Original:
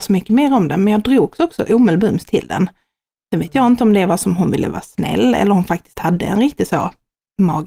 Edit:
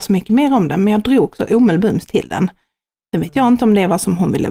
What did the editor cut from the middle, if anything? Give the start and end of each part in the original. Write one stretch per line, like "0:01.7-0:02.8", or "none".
0:01.4-0:01.6